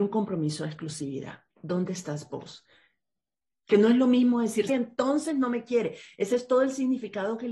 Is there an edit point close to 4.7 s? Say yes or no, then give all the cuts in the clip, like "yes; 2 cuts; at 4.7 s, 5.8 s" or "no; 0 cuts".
yes; 2 cuts; at 1.5 s, 4.7 s